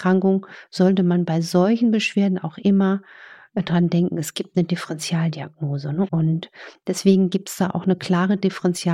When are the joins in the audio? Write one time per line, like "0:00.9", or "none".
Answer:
0:06.1

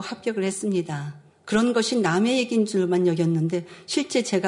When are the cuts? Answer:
0:01.3

